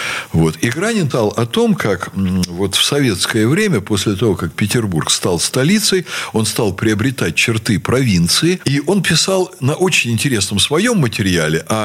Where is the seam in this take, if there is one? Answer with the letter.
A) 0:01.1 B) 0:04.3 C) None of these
A